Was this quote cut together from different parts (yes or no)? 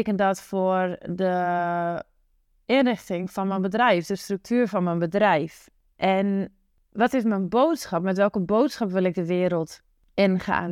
no